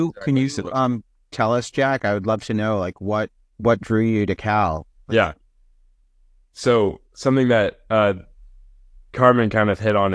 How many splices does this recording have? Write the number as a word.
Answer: one